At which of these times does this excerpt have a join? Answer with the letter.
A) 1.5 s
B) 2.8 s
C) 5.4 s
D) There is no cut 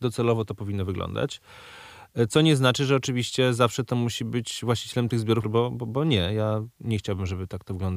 C